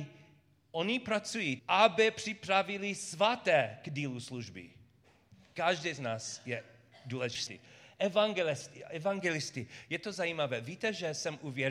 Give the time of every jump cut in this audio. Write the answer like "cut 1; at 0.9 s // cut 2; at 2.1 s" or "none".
cut 1; at 1.6 s